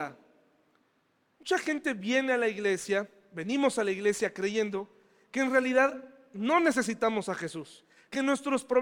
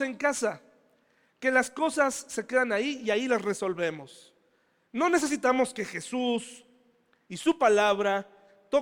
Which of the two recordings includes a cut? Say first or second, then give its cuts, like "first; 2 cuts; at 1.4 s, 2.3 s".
first; 1 cut; at 1.3 s